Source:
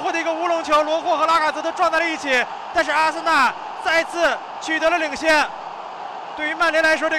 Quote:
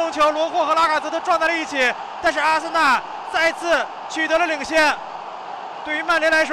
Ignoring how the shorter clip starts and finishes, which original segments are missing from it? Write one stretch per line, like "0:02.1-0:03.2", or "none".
none